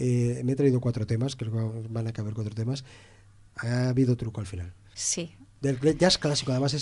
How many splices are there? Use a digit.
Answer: 2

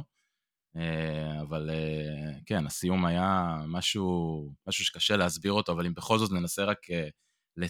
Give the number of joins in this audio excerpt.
1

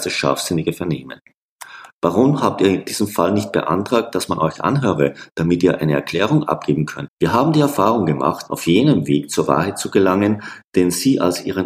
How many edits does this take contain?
2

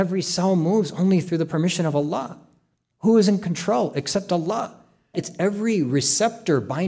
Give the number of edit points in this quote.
2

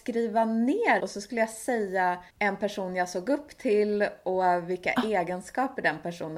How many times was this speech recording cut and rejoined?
2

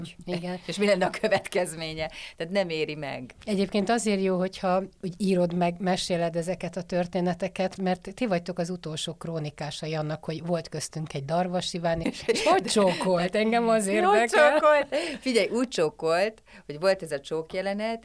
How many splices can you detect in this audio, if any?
2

